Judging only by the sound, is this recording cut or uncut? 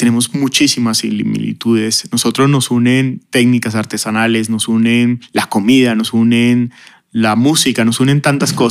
uncut